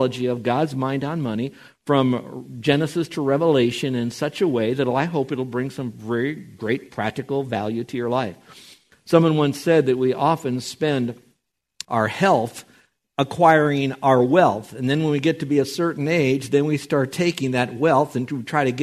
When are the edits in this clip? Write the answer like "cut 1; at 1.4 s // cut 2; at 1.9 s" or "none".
cut 1; at 11.8 s